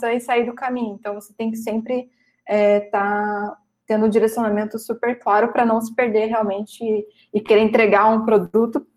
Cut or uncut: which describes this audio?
uncut